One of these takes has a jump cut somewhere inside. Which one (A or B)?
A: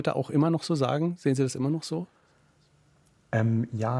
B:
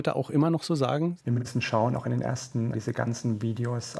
B